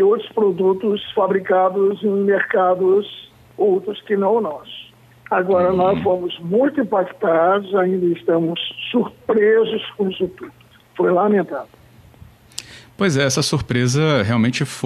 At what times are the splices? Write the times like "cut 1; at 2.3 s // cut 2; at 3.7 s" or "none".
none